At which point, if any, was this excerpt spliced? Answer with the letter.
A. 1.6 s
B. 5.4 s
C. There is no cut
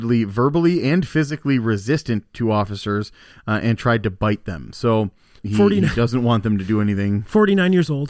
B